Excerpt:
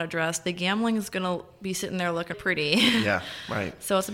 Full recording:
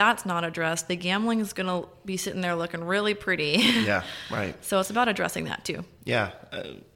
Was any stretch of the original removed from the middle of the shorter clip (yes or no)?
yes